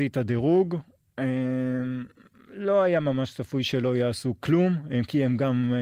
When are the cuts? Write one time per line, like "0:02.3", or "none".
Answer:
none